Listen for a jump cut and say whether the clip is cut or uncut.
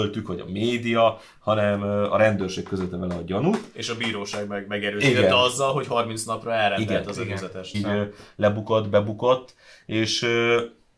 cut